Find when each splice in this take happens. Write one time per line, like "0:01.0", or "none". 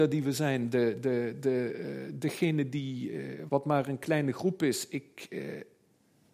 0:03.5